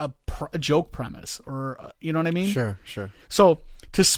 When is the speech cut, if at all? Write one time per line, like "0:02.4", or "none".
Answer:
none